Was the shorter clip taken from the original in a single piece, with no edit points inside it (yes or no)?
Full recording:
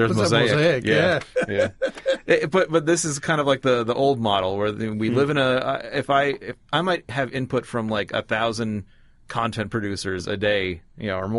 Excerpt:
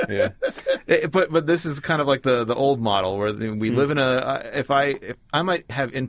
yes